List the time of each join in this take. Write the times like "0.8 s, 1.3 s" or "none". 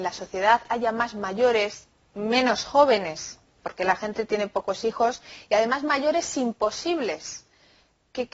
none